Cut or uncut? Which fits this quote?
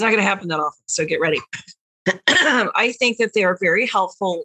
uncut